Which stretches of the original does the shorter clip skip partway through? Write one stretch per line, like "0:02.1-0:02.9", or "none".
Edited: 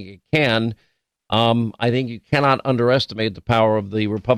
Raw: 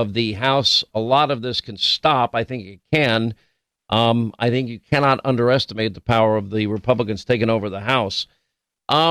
none